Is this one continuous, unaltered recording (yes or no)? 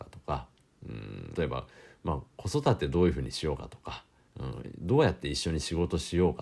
no